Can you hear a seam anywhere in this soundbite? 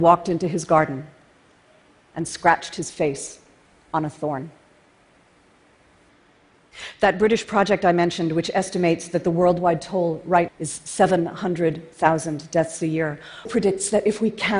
yes; 2 cuts; at 10.5 s, 13.5 s

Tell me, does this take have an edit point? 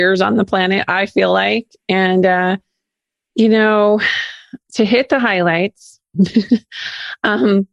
no; 0 cuts

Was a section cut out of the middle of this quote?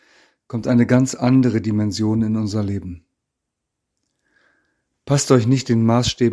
no; 0 cuts

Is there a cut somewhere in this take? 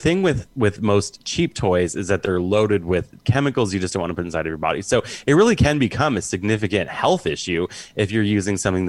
no; 0 cuts

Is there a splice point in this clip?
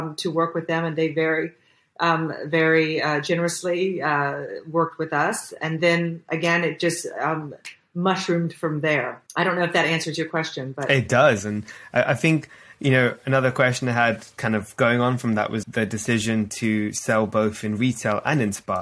yes; 3 cuts; at 9.3 s, 11.4 s, 15.6 s

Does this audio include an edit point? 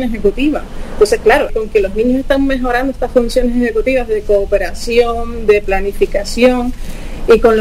yes; 1 cut; at 1.5 s

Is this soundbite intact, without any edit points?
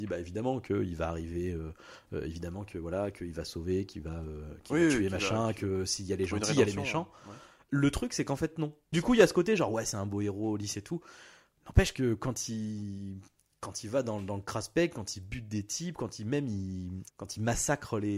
no; 1 cut; at 8.9 s

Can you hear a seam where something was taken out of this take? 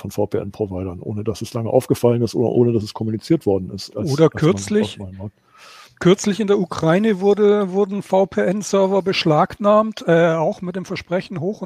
yes; 1 cut; at 3.9 s

